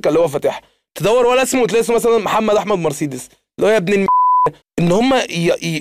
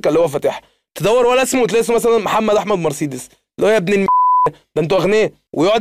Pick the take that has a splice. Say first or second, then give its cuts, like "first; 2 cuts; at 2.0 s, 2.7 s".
first; 1 cut; at 4.6 s